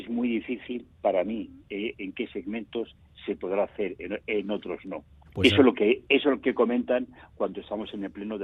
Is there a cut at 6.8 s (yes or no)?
no